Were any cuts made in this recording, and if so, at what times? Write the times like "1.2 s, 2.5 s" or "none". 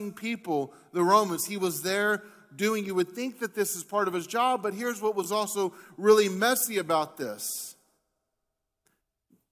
none